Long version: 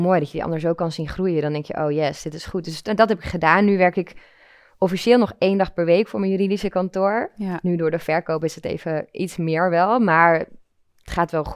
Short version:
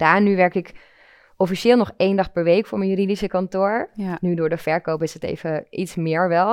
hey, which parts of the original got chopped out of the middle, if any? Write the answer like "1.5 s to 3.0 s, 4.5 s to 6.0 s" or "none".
none

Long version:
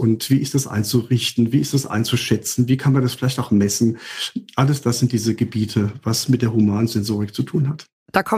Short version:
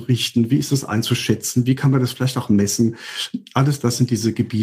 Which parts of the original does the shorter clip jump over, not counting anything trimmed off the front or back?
none

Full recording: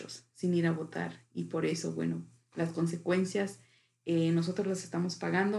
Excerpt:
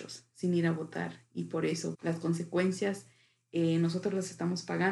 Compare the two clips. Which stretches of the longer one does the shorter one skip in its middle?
1.9 s to 2.5 s

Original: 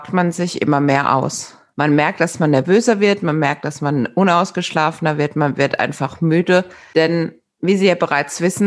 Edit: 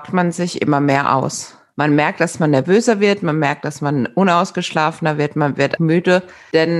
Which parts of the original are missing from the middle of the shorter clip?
5.8 s to 6.2 s

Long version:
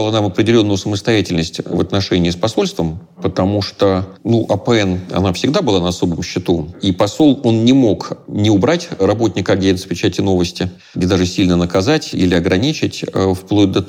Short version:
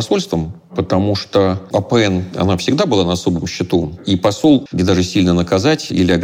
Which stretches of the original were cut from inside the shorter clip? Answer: 4.2 s to 4.5 s, 7.4 s to 10.9 s

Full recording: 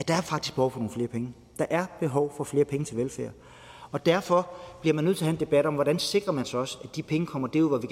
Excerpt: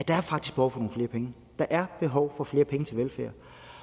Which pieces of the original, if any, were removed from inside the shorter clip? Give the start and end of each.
none

